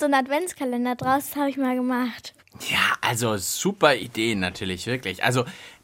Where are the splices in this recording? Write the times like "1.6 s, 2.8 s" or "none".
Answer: none